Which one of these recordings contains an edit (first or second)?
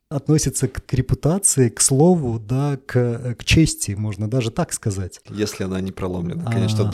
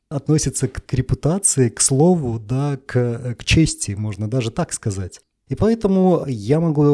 first